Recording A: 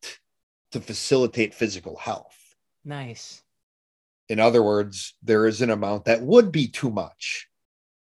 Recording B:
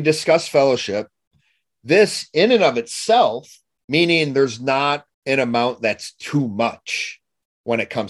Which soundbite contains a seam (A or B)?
B